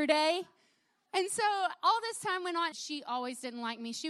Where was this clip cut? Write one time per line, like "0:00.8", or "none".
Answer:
0:01.1
0:02.7

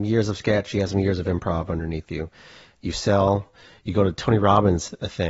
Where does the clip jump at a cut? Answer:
none

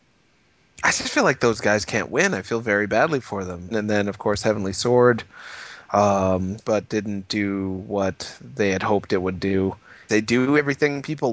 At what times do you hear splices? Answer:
0:03.7
0:06.6
0:10.1

